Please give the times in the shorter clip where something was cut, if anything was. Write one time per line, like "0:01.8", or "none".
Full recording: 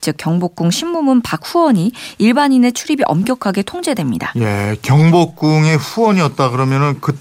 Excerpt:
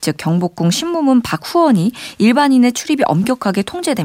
none